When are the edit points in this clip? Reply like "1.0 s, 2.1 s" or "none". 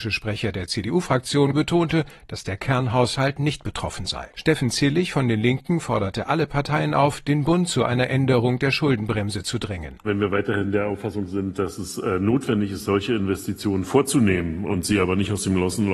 1.5 s, 4.3 s